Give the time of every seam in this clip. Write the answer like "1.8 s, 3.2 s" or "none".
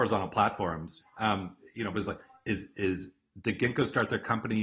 1.0 s